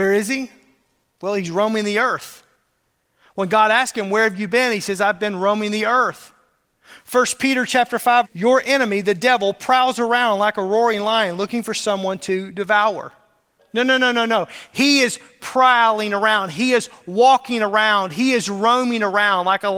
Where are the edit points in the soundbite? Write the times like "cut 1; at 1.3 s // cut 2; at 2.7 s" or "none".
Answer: cut 1; at 8.2 s // cut 2; at 13.6 s